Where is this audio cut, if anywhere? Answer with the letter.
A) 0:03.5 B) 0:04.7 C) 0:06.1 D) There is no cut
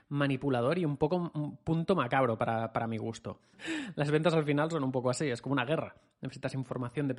A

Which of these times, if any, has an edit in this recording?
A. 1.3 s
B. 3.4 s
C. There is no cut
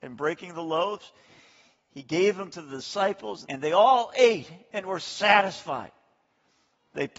B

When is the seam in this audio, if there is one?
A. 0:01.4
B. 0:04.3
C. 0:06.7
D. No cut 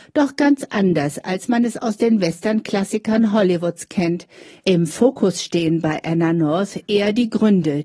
D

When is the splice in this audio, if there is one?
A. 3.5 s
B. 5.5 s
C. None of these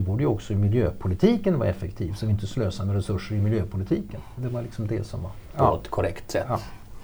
B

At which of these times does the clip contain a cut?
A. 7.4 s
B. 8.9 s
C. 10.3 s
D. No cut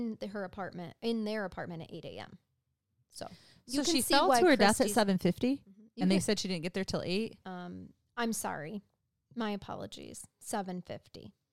A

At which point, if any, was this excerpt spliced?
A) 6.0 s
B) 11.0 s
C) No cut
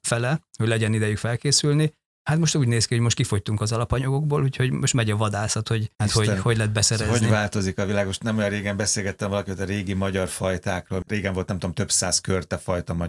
C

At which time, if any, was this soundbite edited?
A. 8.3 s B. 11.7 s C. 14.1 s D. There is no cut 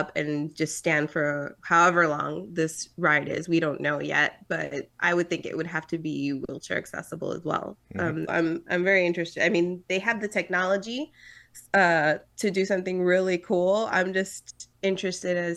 A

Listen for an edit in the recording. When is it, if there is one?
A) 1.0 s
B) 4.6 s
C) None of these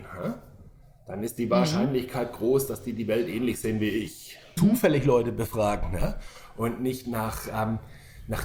B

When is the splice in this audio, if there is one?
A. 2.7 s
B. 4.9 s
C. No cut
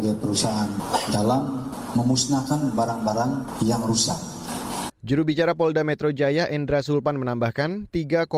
B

